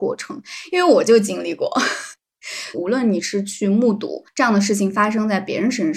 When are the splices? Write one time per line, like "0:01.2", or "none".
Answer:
0:02.7